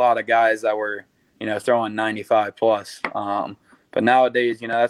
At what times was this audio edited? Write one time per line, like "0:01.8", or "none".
none